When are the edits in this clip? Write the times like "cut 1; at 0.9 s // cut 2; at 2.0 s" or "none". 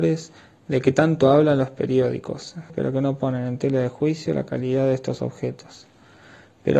cut 1; at 2.7 s